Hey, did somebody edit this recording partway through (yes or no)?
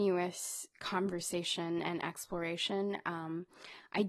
no